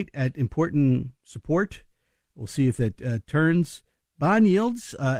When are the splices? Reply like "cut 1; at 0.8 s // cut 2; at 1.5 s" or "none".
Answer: none